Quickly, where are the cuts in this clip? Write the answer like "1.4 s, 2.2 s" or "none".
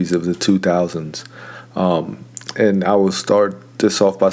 none